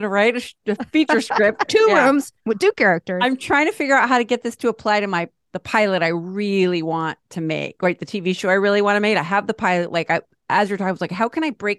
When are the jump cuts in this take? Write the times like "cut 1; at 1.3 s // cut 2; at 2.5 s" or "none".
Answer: cut 1; at 1.7 s